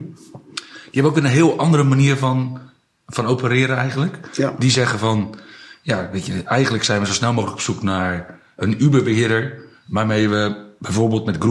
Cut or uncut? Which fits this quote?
uncut